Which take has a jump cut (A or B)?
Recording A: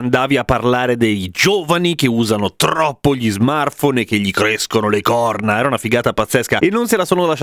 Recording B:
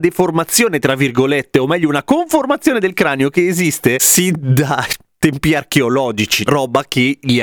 B